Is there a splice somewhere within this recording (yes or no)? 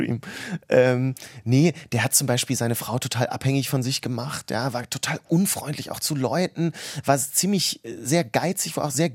no